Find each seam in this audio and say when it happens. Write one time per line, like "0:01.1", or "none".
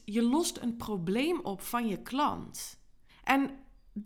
0:03.1